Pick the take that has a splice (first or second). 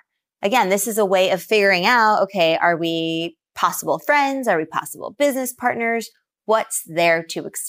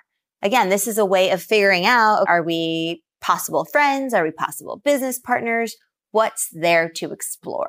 second